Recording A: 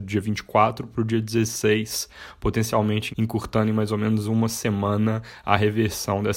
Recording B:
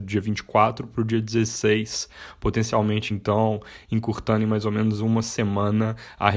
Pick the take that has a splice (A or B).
A